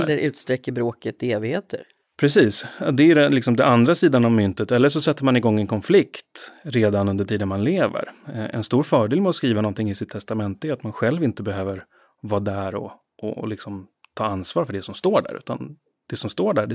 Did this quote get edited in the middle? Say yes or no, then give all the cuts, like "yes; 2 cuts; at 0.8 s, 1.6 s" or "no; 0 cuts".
no; 0 cuts